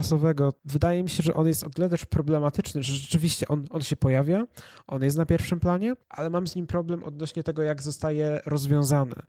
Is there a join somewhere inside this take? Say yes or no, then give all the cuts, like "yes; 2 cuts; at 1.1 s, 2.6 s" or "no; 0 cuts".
no; 0 cuts